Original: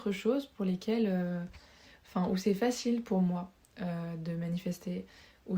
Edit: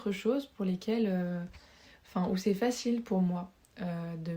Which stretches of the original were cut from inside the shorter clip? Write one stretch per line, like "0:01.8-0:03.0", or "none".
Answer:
none